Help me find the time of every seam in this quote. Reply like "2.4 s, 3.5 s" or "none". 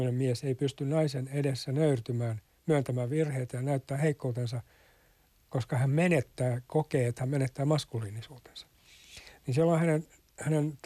none